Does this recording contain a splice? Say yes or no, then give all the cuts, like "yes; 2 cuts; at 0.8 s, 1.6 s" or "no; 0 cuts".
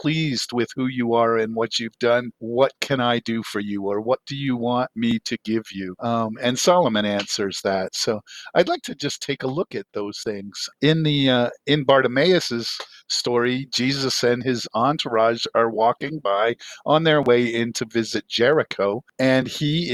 no; 0 cuts